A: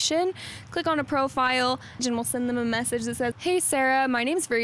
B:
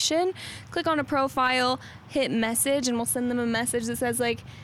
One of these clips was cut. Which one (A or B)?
A